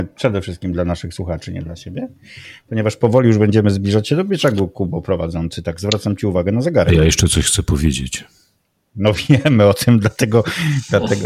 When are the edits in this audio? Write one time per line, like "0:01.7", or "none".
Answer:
none